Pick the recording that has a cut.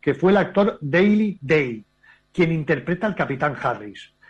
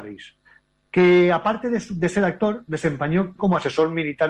second; 1 cut; at 3.4 s

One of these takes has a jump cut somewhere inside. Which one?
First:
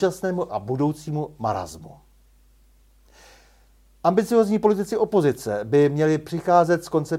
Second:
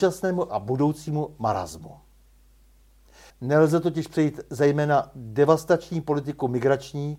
second; 1 cut; at 3.3 s

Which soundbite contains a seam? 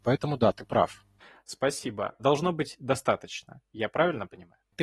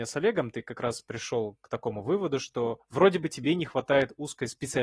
first; 1 cut; at 2.2 s

